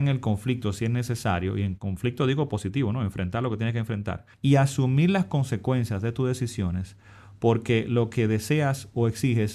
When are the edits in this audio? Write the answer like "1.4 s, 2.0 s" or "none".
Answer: 4.3 s